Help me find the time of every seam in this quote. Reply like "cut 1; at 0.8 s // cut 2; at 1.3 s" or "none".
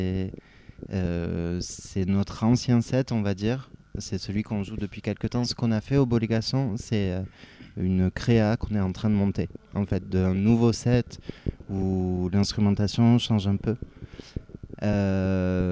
none